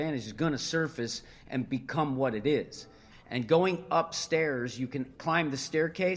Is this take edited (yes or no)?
yes